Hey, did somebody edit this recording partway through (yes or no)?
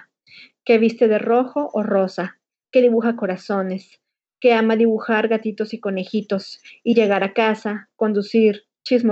no